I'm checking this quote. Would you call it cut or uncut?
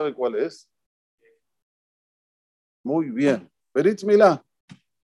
uncut